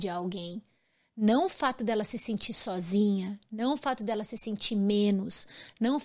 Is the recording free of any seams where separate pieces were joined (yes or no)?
yes